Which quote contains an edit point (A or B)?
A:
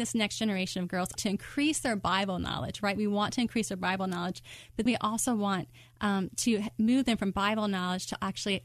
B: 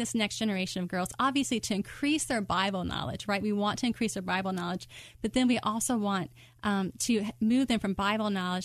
A